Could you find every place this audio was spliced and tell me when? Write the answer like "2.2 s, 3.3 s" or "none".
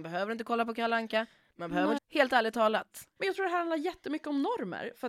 2.0 s, 3.2 s